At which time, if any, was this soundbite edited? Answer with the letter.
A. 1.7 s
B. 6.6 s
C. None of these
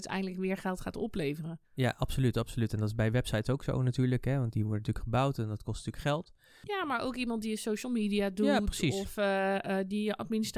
A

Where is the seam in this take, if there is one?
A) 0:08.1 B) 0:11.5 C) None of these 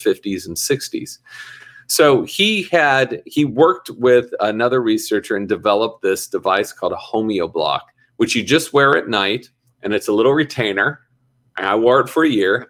C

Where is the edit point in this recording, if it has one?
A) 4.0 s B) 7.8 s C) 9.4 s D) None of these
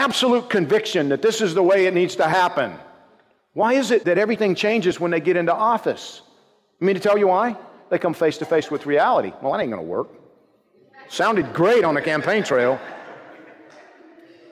A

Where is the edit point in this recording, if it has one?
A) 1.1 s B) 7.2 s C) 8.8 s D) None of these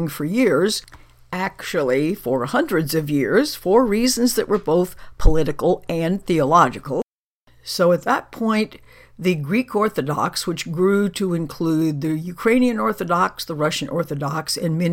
D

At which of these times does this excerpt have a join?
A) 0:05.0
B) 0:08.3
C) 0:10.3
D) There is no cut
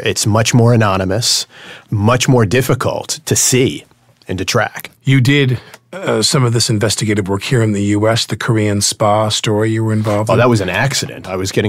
A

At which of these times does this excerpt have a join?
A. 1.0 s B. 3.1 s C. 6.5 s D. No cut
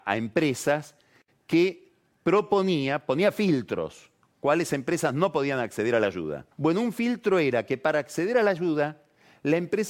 C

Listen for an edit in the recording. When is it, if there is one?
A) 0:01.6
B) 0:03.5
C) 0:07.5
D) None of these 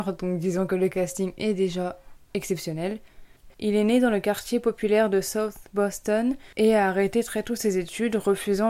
B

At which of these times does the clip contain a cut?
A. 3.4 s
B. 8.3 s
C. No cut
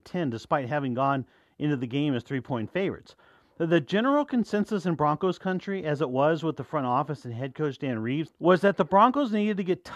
B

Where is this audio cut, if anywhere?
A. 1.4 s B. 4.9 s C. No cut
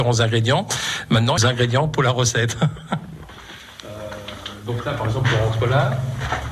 A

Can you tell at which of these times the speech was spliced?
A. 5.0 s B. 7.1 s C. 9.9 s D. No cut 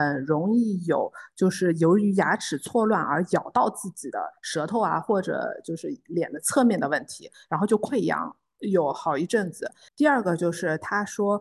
C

